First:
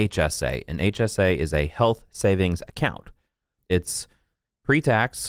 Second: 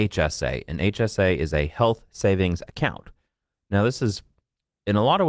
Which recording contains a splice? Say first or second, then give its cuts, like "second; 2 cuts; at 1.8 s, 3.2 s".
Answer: first; 1 cut; at 3.6 s